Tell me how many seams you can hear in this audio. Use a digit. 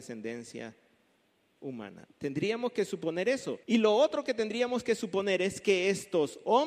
2